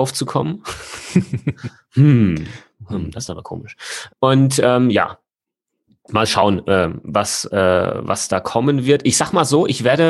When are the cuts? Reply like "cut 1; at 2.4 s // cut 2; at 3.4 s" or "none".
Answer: none